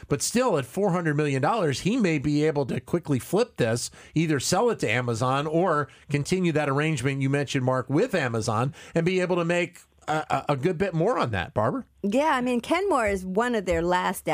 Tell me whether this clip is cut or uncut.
uncut